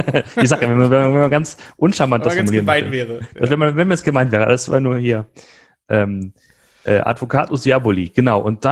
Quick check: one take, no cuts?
yes; 0 cuts

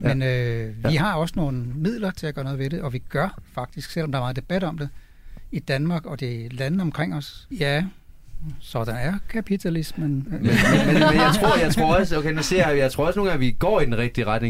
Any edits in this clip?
yes; 2 cuts; at 7.5 s, 10.3 s

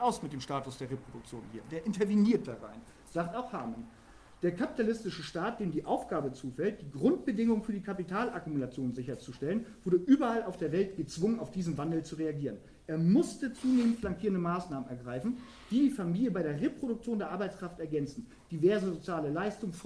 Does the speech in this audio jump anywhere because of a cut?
no; 0 cuts

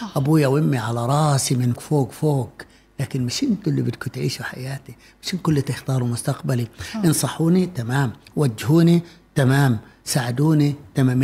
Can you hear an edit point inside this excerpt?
yes; 1 cut; at 1.8 s

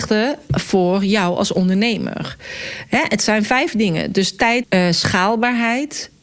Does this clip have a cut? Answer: yes; 1 cut; at 4.6 s

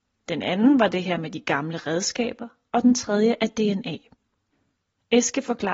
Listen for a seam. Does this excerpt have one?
no; 0 cuts

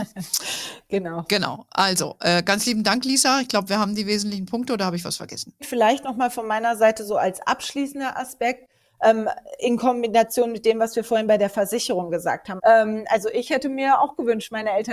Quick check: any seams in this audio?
yes; 2 cuts; at 5.6 s, 12.6 s

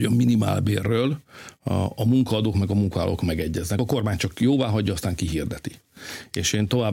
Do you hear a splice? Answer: no; 0 cuts

